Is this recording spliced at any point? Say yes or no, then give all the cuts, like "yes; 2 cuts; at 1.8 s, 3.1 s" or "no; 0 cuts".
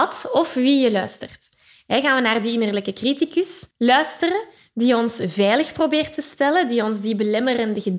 yes; 1 cut; at 3.7 s